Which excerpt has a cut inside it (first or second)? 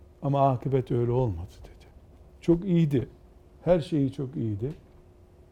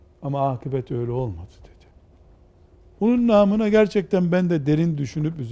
first